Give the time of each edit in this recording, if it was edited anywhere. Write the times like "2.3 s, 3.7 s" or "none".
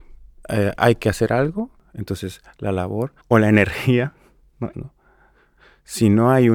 3.2 s, 4.7 s